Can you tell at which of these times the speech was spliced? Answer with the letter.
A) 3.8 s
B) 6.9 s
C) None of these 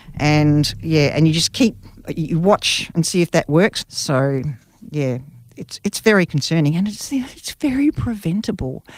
A